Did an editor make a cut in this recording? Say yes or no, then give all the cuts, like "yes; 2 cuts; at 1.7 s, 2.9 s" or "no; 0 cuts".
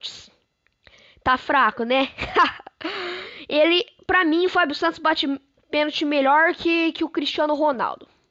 no; 0 cuts